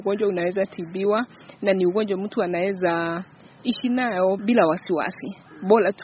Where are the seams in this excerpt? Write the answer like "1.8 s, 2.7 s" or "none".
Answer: 4.4 s